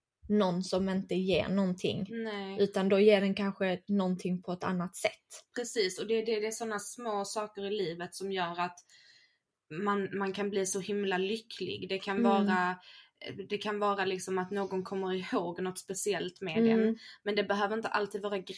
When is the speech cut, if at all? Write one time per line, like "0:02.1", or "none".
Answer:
none